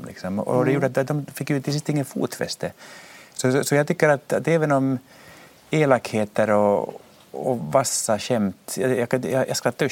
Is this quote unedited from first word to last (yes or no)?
yes